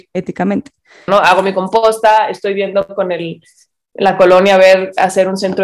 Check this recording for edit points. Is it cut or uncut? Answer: cut